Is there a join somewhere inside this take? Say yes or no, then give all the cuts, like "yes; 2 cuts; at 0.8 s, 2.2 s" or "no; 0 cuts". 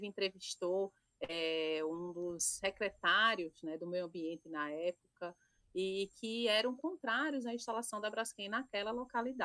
no; 0 cuts